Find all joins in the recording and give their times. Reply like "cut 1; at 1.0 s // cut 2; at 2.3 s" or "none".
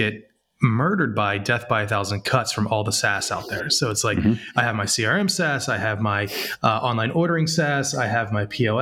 none

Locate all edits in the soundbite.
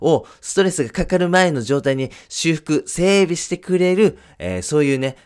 none

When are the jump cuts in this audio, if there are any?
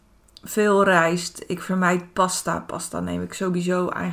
none

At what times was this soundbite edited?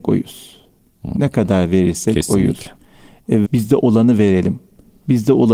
cut 1; at 3.4 s

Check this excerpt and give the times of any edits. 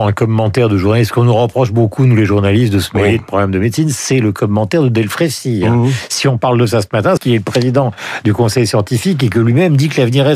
cut 1; at 7.2 s

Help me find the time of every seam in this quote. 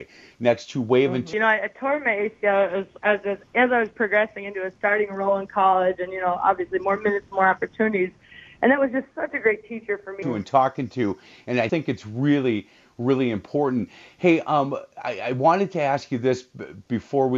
cut 1; at 1.3 s // cut 2; at 10.2 s // cut 3; at 11.7 s

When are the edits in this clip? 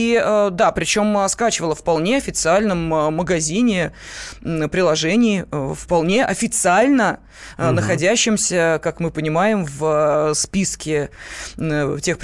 none

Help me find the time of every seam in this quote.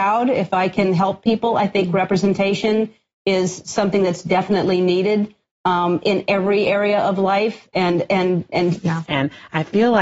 cut 1; at 9.0 s

